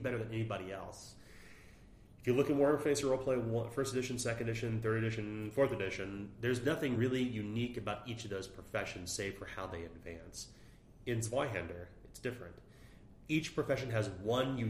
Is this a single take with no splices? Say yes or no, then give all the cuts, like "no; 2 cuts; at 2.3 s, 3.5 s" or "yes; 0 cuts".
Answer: yes; 0 cuts